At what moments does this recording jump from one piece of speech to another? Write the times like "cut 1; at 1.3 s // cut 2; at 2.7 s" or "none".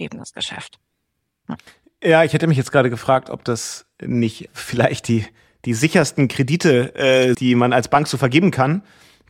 cut 1; at 4.5 s // cut 2; at 7.3 s